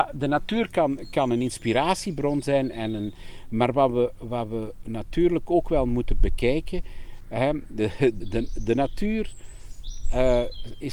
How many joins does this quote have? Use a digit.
1